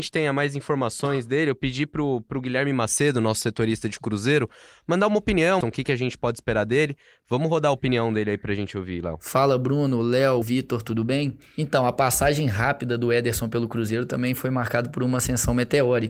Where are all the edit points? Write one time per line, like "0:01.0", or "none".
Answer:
0:05.6
0:10.4

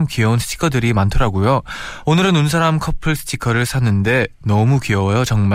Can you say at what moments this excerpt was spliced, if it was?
none

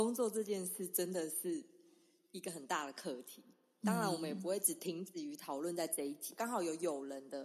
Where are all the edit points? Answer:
none

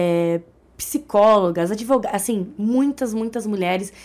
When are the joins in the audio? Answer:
none

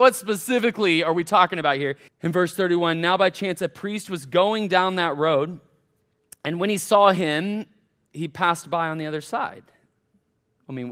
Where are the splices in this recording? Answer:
0:02.1

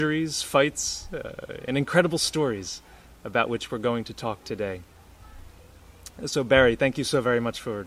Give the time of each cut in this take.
none

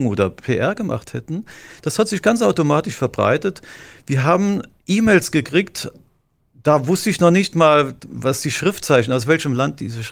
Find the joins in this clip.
none

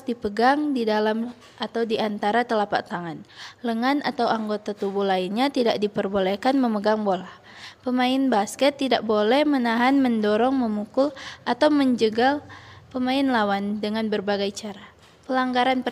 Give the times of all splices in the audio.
none

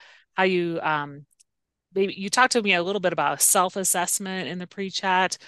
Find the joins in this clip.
none

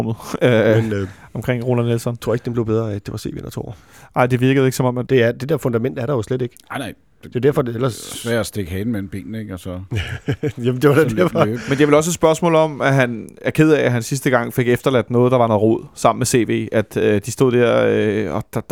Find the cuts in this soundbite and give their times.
0:05.1

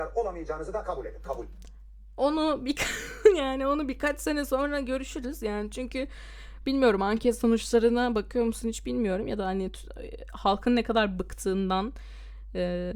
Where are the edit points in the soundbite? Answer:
none

